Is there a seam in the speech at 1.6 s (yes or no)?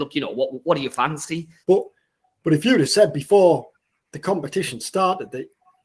yes